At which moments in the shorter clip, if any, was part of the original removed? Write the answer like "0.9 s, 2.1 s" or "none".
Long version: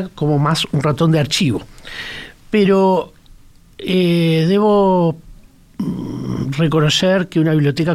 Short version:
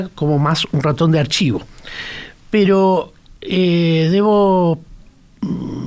3.4 s